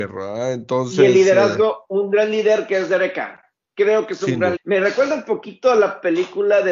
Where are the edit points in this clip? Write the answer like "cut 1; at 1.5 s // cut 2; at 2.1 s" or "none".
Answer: cut 1; at 4.6 s